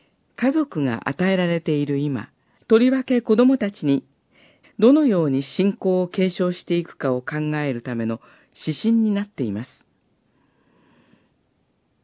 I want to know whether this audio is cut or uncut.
cut